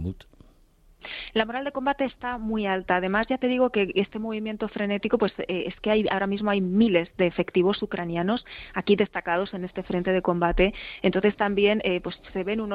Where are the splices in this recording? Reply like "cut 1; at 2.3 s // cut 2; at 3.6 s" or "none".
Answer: none